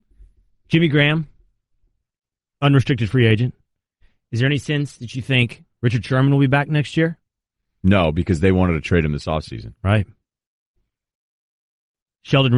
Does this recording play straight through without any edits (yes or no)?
yes